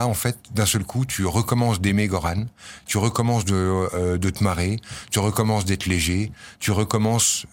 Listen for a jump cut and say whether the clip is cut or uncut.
uncut